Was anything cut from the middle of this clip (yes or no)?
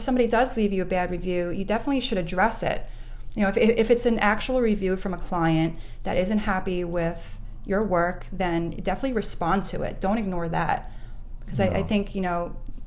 no